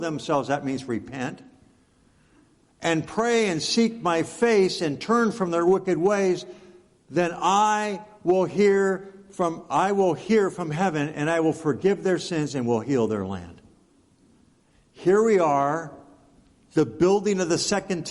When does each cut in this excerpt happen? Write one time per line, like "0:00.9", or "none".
none